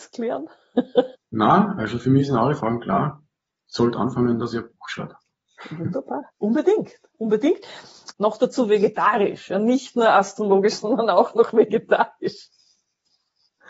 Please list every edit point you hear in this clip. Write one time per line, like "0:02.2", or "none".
0:01.2
0:06.3
0:08.1